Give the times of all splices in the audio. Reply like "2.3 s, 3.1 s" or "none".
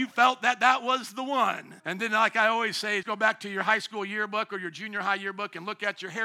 1.8 s, 3.0 s